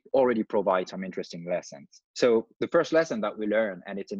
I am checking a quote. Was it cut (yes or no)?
yes